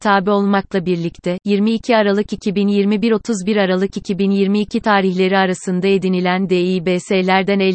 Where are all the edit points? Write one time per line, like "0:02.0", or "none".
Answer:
0:01.4